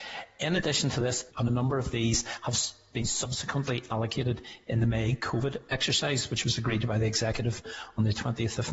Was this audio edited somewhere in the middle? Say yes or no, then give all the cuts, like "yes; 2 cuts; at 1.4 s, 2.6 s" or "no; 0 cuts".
yes; 1 cut; at 1.3 s